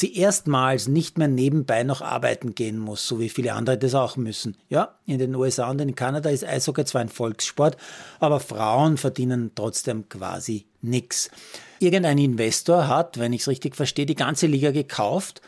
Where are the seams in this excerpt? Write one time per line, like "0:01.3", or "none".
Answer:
0:11.8